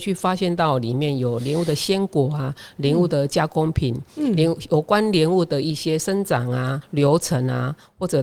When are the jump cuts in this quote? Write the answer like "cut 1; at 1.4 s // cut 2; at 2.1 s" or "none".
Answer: cut 1; at 6.8 s